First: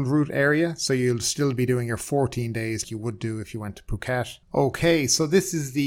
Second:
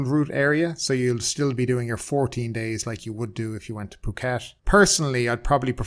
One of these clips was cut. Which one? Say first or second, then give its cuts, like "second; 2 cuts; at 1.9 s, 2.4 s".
first; 2 cuts; at 2.8 s, 4.4 s